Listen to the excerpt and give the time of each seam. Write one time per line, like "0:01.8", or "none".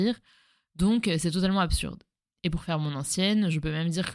none